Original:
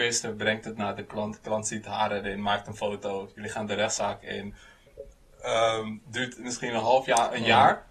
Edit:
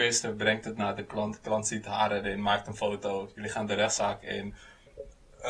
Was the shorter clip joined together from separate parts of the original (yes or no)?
no